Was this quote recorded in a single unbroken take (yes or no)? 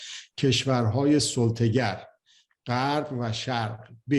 yes